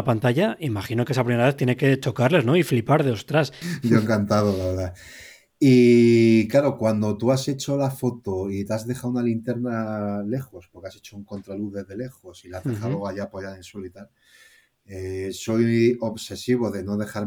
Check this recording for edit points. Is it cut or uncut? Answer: cut